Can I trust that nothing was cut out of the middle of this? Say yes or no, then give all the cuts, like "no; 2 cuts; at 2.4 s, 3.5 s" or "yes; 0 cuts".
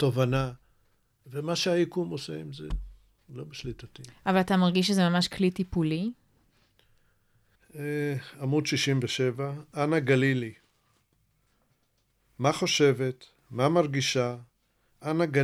no; 1 cut; at 7.5 s